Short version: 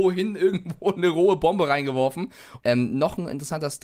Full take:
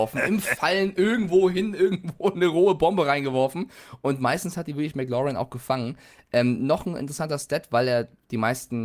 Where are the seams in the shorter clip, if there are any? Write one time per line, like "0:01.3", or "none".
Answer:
0:02.6